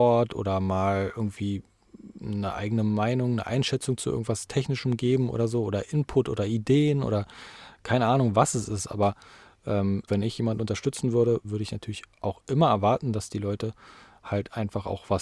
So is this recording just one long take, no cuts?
no; 2 cuts; at 10.1 s, 11.4 s

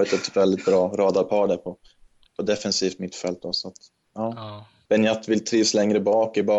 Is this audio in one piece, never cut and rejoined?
no; 1 cut; at 4.9 s

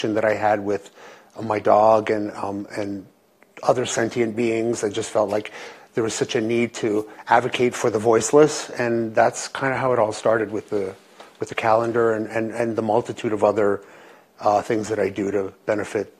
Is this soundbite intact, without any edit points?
yes; 0 cuts

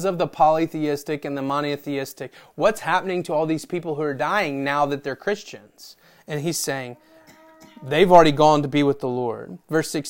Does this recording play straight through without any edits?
yes; 0 cuts

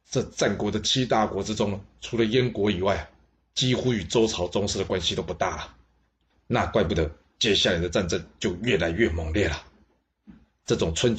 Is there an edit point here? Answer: no; 0 cuts

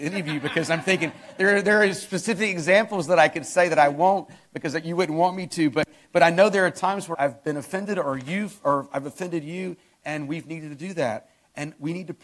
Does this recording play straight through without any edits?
no; 1 cut; at 7.1 s

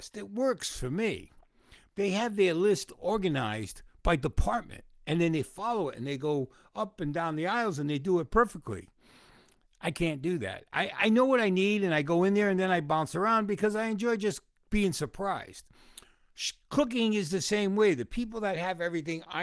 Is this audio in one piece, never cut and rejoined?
no; 1 cut; at 1.9 s

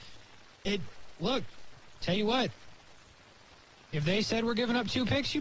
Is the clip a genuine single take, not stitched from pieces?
yes; 0 cuts

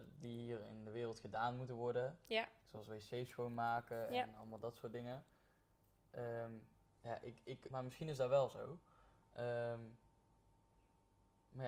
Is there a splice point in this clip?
yes; 1 cut; at 7.7 s

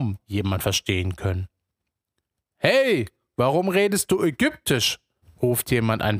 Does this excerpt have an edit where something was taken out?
no; 0 cuts

